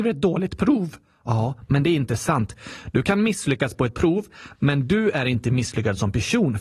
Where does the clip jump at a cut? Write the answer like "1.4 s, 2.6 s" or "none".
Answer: none